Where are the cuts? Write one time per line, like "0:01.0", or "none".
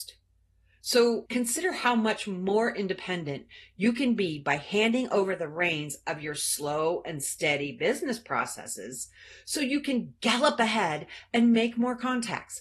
0:01.3